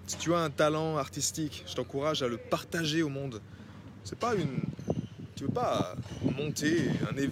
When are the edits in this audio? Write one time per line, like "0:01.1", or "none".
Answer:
0:04.0